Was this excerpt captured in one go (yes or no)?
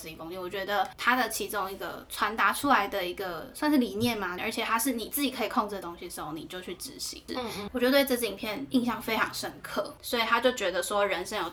no